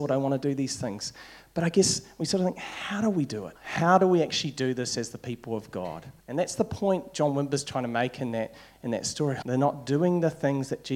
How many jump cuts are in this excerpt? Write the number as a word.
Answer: three